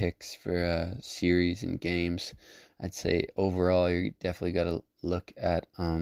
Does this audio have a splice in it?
no; 0 cuts

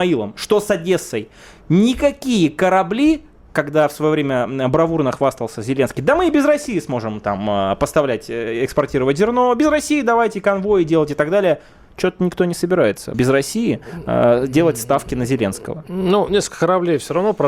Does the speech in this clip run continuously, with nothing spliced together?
no; 1 cut; at 13.1 s

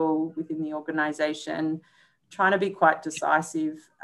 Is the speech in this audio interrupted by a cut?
no; 0 cuts

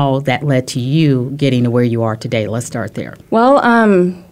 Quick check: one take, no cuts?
no; 1 cut; at 3.2 s

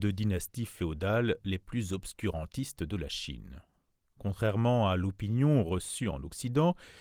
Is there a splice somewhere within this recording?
no; 0 cuts

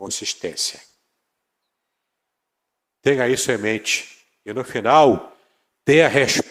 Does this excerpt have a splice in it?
no; 0 cuts

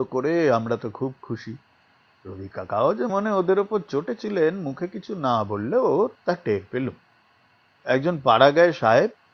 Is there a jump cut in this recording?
yes; 1 cut; at 3.1 s

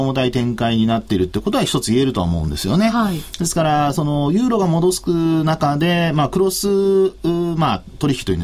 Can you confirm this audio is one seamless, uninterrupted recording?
yes; 0 cuts

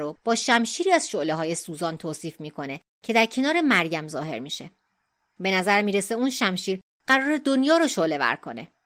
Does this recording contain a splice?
no; 0 cuts

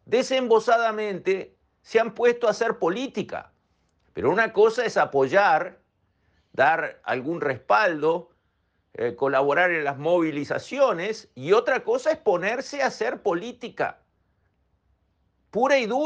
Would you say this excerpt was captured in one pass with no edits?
no; 1 cut; at 4.0 s

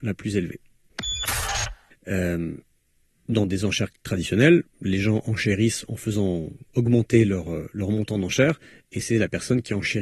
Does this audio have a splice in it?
yes; 1 cut; at 1.9 s

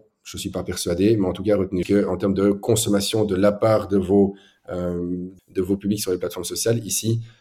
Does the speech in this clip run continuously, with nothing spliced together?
no; 2 cuts; at 1.8 s, 5.4 s

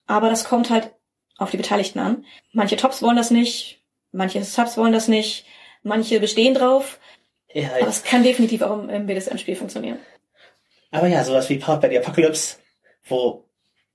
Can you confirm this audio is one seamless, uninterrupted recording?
yes; 0 cuts

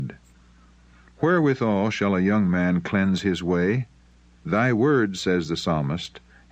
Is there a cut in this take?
yes; 1 cut; at 4.4 s

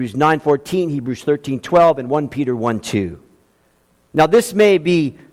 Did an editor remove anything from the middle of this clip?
yes; 1 cut; at 3.9 s

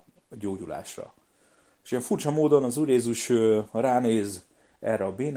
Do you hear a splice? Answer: no; 0 cuts

